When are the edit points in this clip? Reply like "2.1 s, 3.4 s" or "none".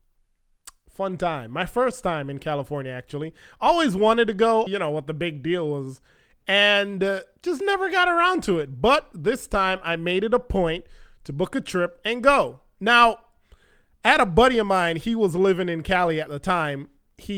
4.7 s